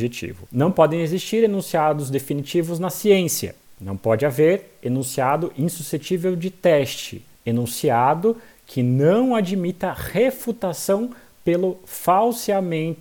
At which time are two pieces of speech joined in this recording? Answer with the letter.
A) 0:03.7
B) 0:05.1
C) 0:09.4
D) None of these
D